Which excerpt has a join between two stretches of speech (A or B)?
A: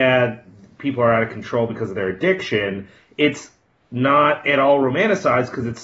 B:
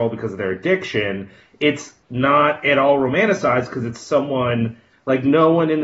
B